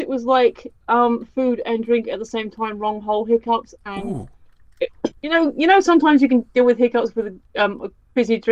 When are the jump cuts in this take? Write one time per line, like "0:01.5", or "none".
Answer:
0:05.2